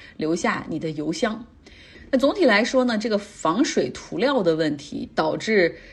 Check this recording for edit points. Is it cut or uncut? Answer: uncut